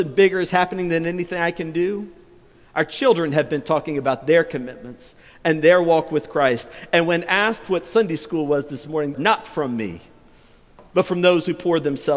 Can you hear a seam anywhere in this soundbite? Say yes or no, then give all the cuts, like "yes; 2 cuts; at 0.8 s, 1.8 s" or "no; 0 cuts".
yes; 1 cut; at 9.1 s